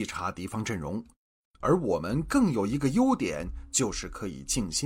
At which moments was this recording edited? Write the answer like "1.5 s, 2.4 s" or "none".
1.4 s

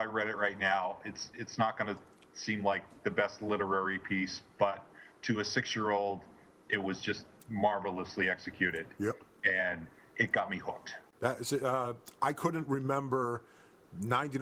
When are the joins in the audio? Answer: none

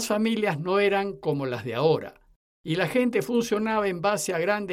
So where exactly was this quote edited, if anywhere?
2.5 s

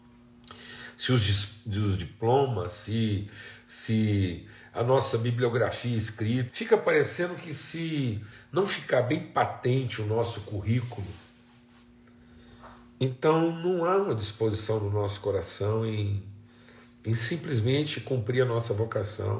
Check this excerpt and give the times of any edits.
6.5 s

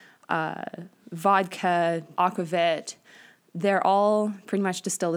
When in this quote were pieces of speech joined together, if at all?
2.1 s

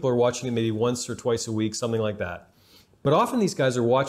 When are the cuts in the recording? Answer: none

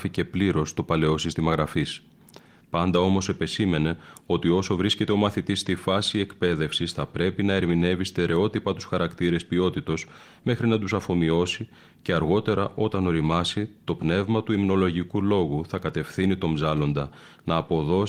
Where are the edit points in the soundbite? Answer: 2.6 s

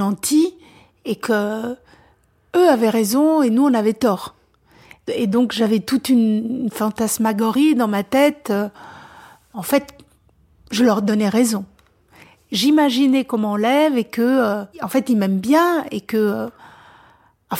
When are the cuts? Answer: 1.2 s, 14.7 s

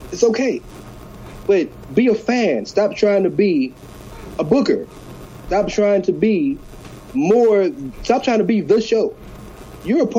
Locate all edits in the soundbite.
1.4 s

